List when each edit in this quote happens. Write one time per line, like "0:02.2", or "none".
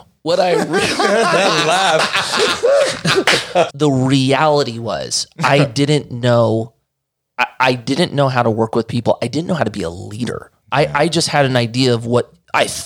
0:03.7